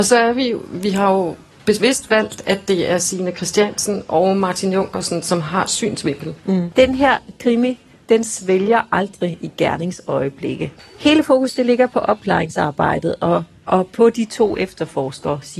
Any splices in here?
yes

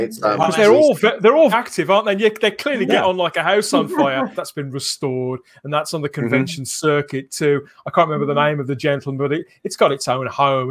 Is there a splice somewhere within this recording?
yes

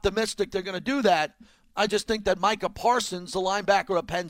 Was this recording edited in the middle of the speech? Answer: no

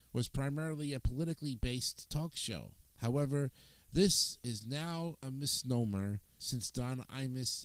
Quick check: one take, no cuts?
yes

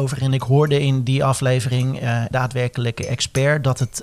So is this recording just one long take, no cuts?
no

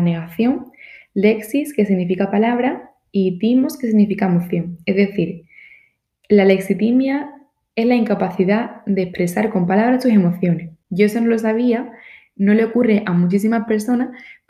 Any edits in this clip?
yes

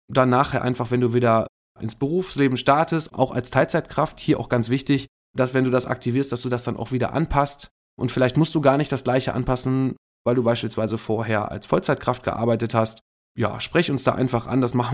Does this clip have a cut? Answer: no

